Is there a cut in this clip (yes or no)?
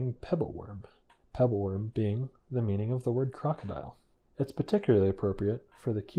no